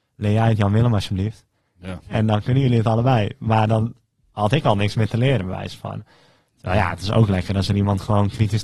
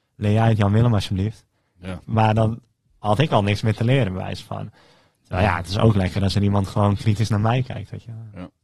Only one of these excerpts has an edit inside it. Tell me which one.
second; 1 cut; at 2.0 s

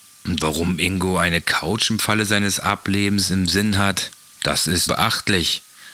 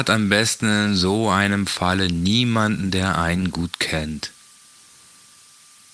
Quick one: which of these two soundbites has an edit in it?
first; 1 cut; at 4.9 s

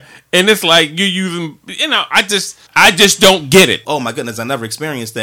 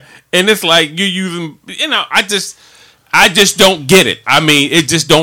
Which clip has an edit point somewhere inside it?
first; 2 cuts; at 2.7 s, 3.8 s

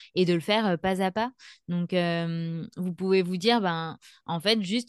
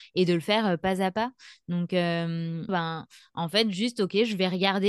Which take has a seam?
second; 1 cut; at 2.7 s

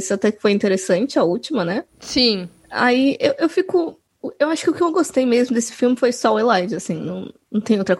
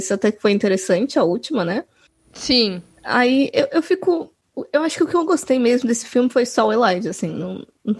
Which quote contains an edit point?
first; 1 cut; at 1.9 s

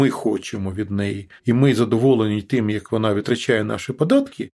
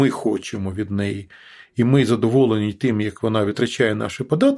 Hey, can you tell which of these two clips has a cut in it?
first; 1 cut; at 1.4 s

